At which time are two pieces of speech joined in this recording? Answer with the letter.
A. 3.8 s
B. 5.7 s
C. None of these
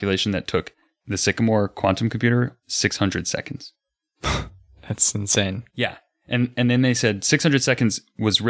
C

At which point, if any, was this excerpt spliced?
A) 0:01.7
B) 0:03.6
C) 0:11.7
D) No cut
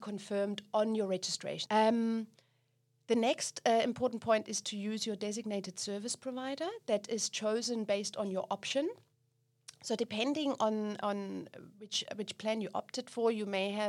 A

